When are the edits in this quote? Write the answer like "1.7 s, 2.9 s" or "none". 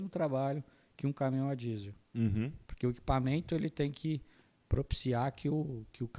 2.7 s

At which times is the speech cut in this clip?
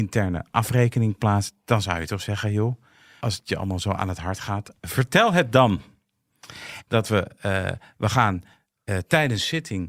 3.2 s, 6.9 s

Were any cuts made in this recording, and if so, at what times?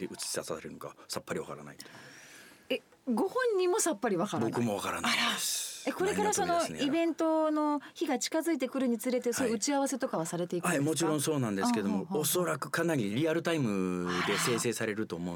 none

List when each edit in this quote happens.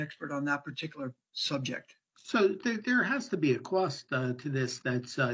none

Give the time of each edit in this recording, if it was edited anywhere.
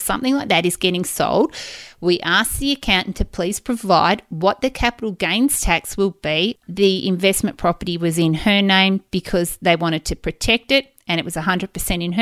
6.6 s

